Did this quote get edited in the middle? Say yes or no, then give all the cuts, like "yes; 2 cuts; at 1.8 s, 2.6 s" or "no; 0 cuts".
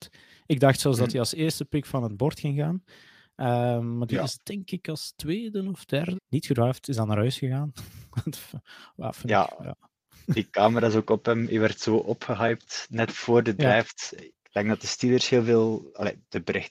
yes; 2 cuts; at 6.1 s, 14.3 s